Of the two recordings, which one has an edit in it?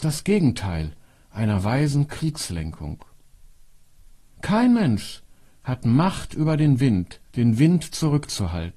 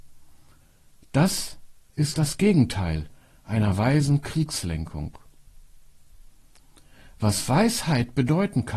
first; 2 cuts; at 4.3 s, 7.3 s

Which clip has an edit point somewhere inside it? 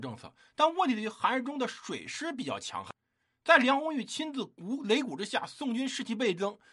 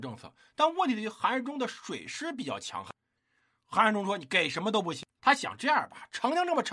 second; 2 cuts; at 3.2 s, 5.2 s

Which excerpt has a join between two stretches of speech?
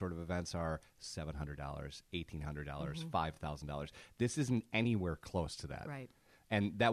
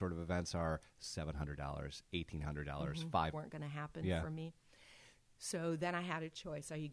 second; 1 cut; at 3.3 s

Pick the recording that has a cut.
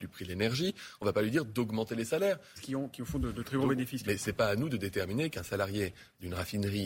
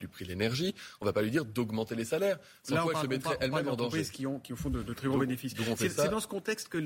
first; 2 cuts; at 2.6 s, 4.0 s

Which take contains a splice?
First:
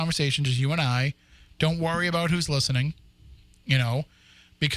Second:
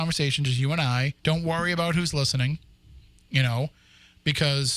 second; 1 cut; at 1.2 s

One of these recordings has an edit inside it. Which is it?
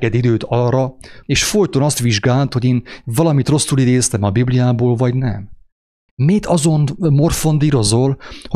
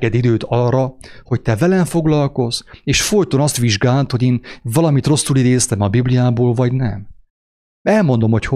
first; 2 cuts; at 1.2 s, 6.1 s

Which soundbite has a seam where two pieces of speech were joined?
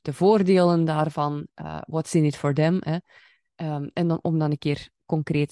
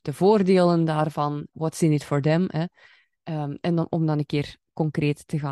second; 1 cut; at 1.5 s

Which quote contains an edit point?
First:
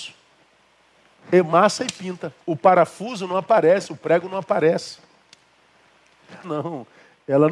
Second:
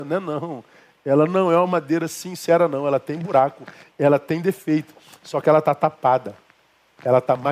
first; 2 cuts; at 2.4 s, 6.4 s

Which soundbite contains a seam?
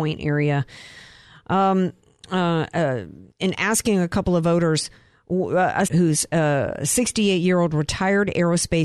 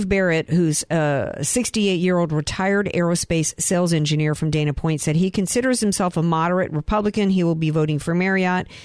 first; 2 cuts; at 3.3 s, 5.9 s

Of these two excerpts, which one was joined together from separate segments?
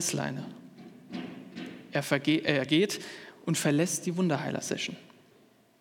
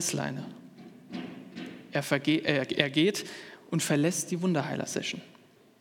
first; 1 cut; at 2.7 s

